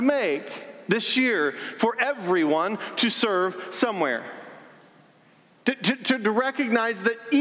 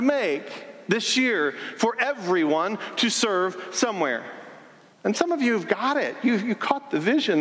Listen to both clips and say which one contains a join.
second; 1 cut; at 4.9 s

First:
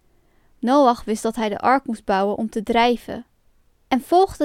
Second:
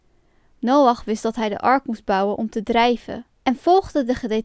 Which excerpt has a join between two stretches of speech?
second; 1 cut; at 3.3 s

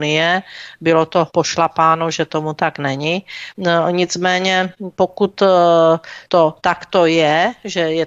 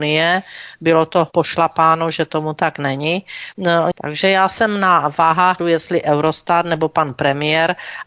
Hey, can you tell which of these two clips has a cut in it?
second; 2 cuts; at 3.9 s, 5.6 s

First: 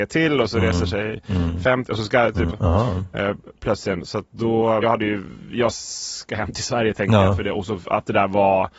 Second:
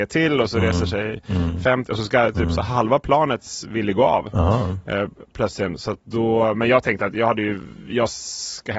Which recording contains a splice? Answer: first; 2 cuts; at 2.5 s, 4.8 s

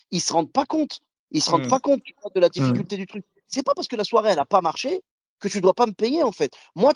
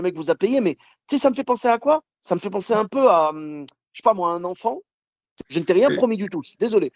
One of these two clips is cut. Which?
second; 1 cut; at 5.4 s

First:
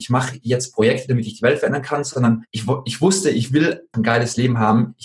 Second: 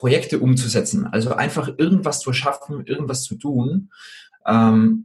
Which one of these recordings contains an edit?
first; 2 cuts; at 2.5 s, 3.9 s

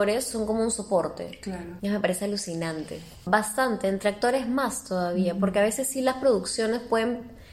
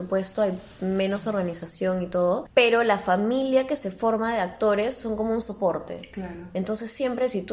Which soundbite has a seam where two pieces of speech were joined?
first; 2 cuts; at 1.8 s, 3.3 s

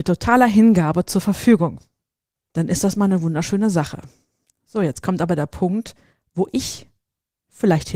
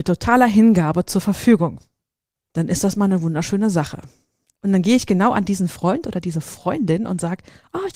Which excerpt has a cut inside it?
second; 1 cut; at 4.6 s

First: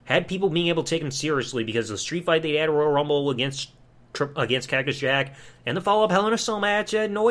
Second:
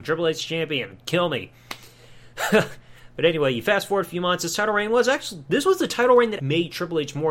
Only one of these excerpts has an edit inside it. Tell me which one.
second; 1 cut; at 6.4 s

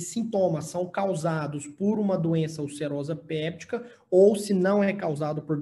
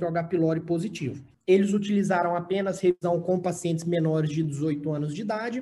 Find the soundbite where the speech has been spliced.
second; 1 cut; at 1.3 s

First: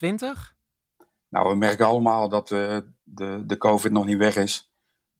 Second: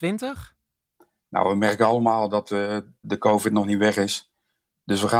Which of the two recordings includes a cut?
second; 1 cut; at 3.0 s

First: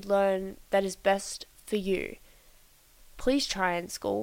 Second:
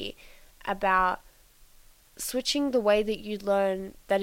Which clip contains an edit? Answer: first; 1 cut; at 3.0 s

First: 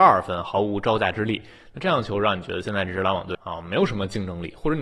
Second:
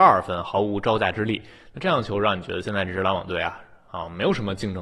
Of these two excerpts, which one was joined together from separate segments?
first; 1 cut; at 3.3 s

